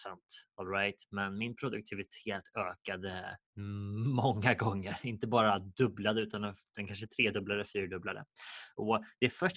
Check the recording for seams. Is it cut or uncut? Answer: cut